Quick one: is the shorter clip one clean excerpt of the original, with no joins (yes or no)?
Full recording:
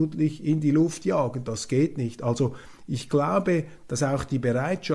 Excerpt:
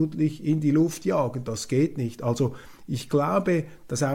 yes